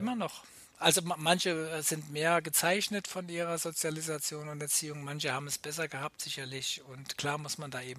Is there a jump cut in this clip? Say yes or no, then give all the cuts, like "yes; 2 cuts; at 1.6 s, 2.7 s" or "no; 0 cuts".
no; 0 cuts